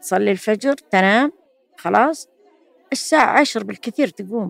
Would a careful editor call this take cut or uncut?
uncut